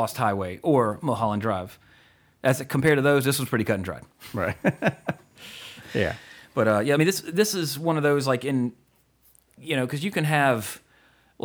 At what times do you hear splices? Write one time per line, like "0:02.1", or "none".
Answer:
none